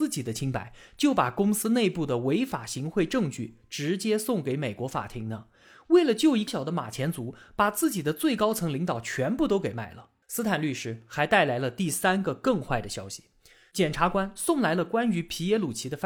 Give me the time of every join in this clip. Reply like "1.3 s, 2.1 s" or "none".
6.5 s, 10.2 s